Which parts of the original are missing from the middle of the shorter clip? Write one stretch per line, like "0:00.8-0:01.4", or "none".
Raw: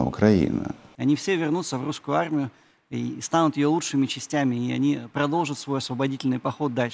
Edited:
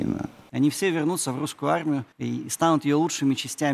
0:02.6-0:02.8